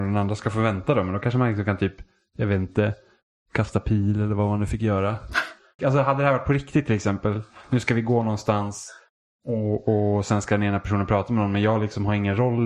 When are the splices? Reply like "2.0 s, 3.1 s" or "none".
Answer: 5.8 s